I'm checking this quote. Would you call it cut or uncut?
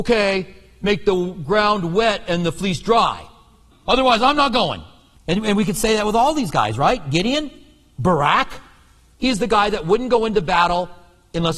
cut